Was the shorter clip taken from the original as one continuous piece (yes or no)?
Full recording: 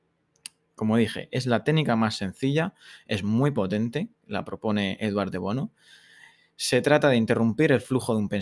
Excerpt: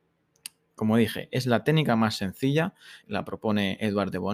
no